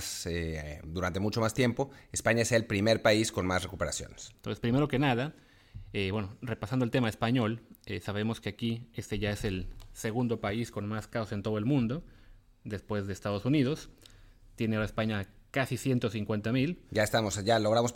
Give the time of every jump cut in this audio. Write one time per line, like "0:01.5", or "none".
0:04.3